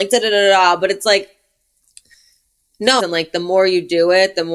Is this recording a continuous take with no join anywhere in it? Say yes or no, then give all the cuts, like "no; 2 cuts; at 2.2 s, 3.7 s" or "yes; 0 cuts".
no; 1 cut; at 3.0 s